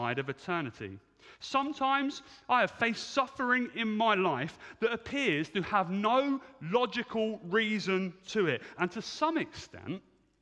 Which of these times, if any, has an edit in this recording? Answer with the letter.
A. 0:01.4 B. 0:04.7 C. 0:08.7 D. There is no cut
C